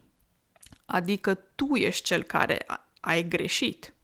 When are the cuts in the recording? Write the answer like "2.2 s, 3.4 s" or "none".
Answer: none

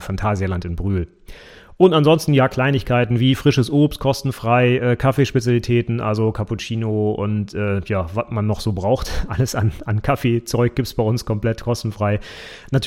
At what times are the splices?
none

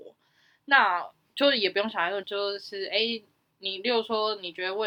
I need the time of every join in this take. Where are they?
2.2 s

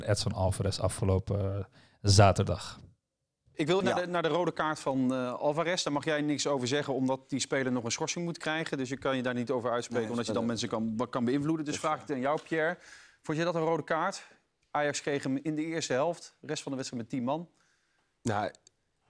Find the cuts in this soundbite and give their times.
3.8 s

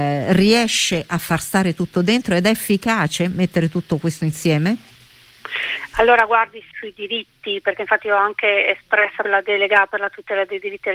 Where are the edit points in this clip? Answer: 6.7 s, 9.2 s

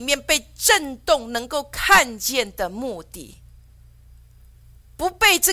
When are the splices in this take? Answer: none

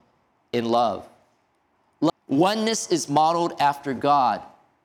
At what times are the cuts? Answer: 2.1 s

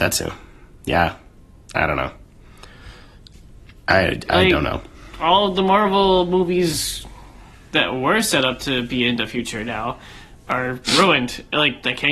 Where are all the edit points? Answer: none

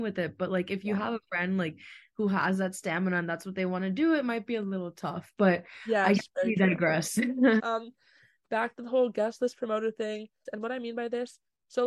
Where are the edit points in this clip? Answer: 7.6 s, 10.5 s

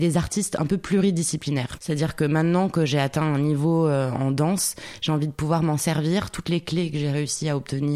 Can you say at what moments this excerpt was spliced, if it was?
1.8 s

